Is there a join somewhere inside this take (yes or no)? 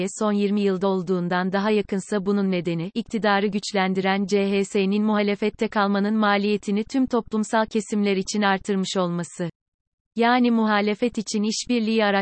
yes